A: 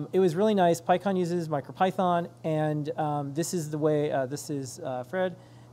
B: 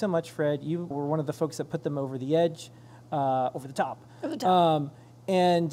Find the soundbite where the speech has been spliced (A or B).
B